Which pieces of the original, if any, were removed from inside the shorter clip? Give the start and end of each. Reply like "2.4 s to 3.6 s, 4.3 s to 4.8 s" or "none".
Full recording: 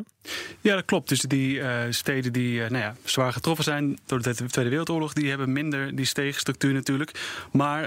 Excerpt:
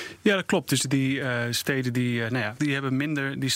3.0 s to 5.1 s